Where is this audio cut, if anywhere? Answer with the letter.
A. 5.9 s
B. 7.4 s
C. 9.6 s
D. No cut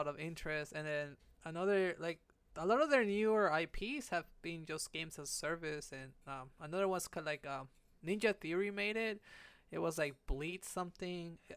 D